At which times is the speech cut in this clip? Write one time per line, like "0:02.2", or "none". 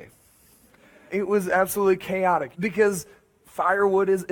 0:01.1
0:02.5